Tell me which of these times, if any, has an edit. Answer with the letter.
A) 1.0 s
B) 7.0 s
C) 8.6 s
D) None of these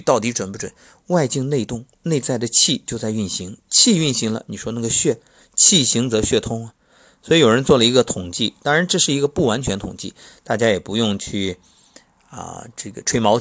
A